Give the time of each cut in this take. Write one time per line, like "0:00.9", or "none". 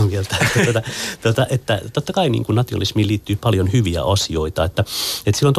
none